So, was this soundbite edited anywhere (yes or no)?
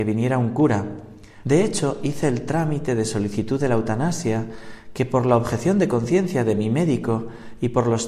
yes